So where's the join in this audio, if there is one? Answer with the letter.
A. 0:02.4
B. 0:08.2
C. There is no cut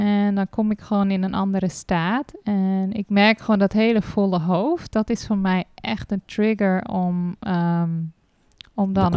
C